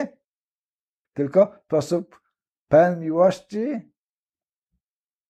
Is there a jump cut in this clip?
yes; 1 cut; at 1.0 s

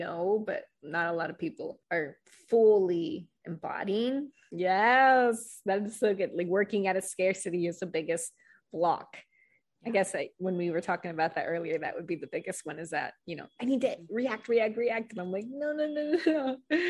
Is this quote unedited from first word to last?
no; 2 cuts; at 1.8 s, 4.5 s

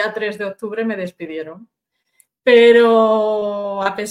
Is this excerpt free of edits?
no; 1 cut; at 2.3 s

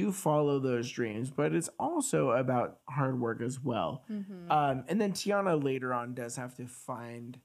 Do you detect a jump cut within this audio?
no; 0 cuts

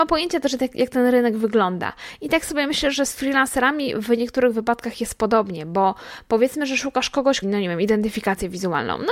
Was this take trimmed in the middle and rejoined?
yes; 1 cut; at 7.4 s

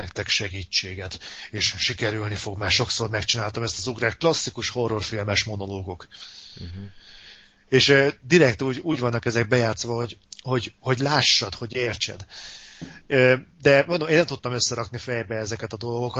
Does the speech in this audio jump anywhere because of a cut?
no; 0 cuts

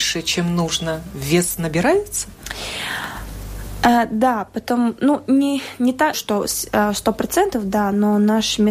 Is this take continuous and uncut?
no; 1 cut; at 6.1 s

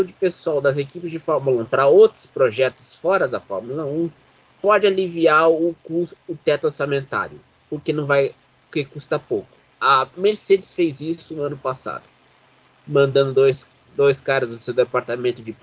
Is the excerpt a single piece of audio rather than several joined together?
yes; 0 cuts

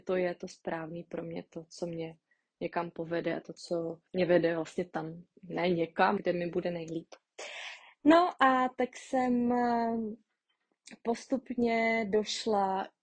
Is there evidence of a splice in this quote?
yes; 2 cuts; at 4.1 s, 6.2 s

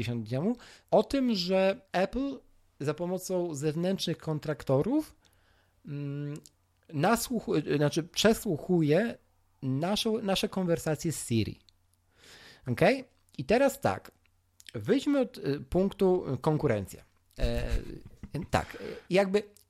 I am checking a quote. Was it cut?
yes; 1 cut; at 17.4 s

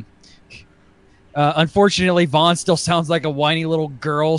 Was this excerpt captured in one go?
yes; 0 cuts

